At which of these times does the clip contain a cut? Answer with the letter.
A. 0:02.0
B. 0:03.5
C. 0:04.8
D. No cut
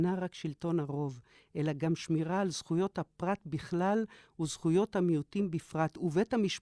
D